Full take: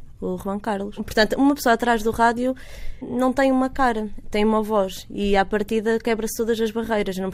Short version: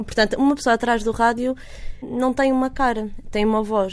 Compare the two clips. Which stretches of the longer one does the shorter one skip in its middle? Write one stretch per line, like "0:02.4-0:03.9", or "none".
none